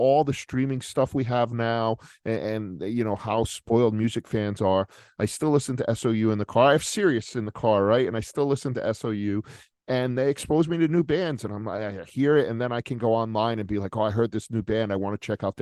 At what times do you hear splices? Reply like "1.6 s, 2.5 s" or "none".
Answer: none